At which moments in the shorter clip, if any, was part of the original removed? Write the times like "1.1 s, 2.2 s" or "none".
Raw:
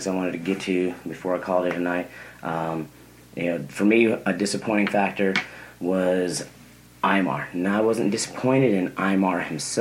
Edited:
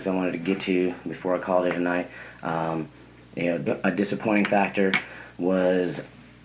3.7 s